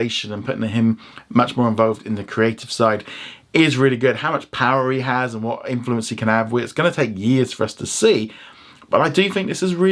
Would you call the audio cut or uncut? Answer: uncut